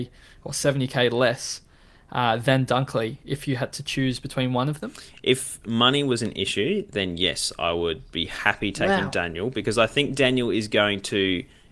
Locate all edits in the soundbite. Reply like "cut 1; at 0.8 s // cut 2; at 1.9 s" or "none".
none